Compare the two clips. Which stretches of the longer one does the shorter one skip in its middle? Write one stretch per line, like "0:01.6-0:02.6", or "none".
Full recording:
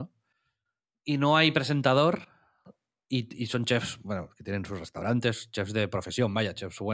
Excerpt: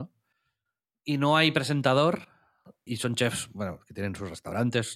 0:02.9-0:03.4